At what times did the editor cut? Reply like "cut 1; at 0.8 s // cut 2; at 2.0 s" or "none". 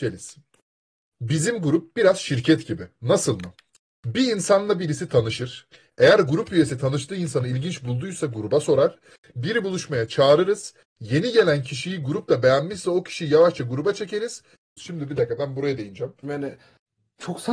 cut 1; at 14.8 s // cut 2; at 16.2 s